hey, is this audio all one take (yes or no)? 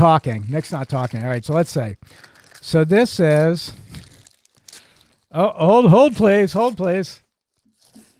yes